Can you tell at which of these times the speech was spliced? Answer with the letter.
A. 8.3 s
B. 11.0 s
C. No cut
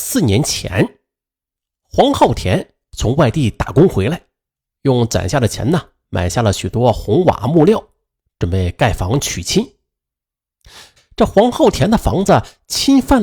B